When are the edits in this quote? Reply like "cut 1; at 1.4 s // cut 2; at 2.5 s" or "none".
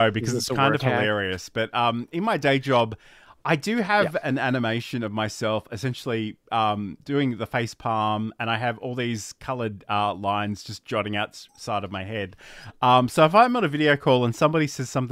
none